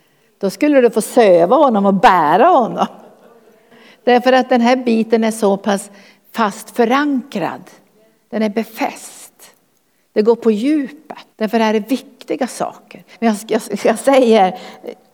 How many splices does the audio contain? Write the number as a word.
two